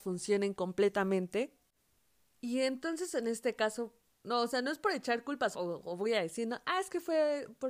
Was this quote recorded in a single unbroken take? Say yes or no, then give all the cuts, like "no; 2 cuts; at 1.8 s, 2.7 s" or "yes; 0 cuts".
no; 2 cuts; at 4.1 s, 5.5 s